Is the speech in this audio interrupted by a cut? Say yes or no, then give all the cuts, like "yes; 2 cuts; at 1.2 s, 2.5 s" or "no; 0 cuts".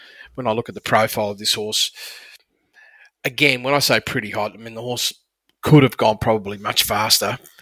no; 0 cuts